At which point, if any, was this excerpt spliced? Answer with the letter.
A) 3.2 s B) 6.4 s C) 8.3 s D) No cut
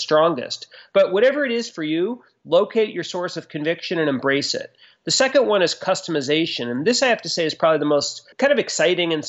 C